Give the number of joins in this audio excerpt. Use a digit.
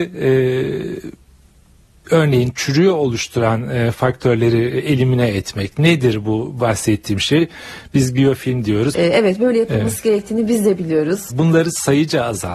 2